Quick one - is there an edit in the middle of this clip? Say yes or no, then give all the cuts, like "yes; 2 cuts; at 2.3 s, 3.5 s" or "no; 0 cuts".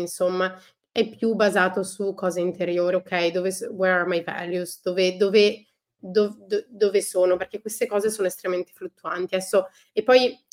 yes; 1 cut; at 2.9 s